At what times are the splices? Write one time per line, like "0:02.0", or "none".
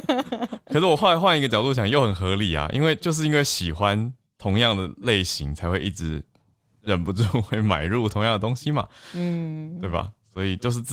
none

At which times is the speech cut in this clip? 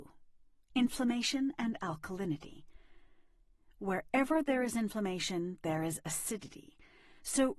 none

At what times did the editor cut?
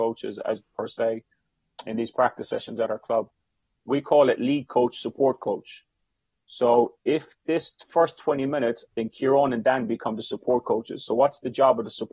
0:08.9

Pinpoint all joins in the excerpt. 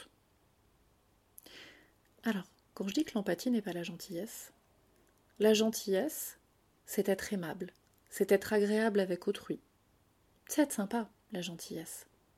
none

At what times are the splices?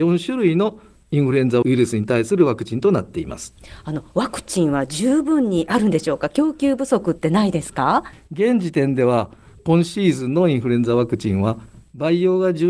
none

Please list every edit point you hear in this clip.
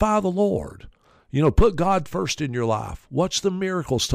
none

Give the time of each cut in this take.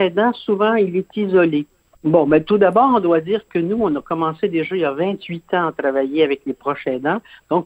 0:02.0

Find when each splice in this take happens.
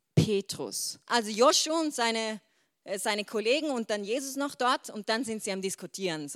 0:01.1

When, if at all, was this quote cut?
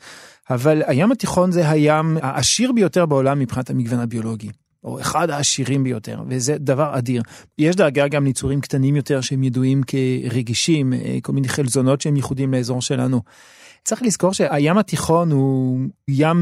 0:07.5

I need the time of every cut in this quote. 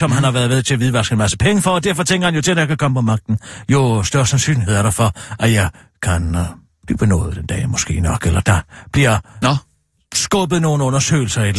none

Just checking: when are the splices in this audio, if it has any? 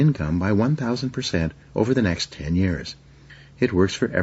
0:01.6

